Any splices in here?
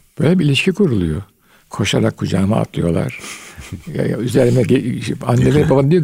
yes; 1 cut; at 1.6 s

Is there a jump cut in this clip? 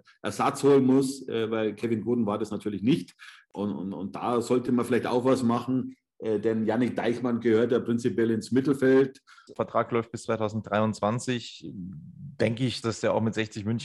yes; 2 cuts; at 9.5 s, 12.8 s

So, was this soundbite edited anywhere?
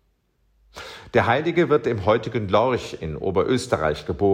no; 0 cuts

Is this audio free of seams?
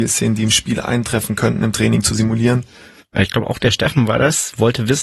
no; 1 cut; at 3.0 s

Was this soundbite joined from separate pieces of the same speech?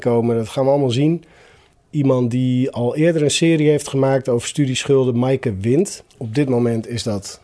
yes; 1 cut; at 6.1 s

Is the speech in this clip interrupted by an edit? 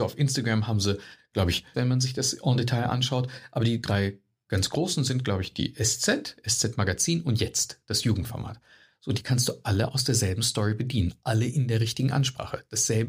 yes; 1 cut; at 1.7 s

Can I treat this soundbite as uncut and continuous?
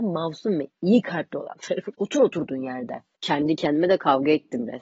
no; 2 cuts; at 1.9 s, 3.2 s

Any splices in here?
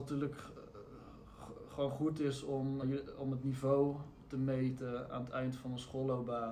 yes; 1 cut; at 2.8 s

